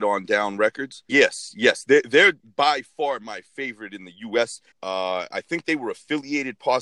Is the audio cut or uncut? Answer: cut